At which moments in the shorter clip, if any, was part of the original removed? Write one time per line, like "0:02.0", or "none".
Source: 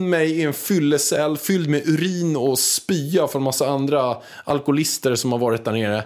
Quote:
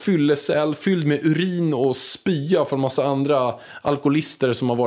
none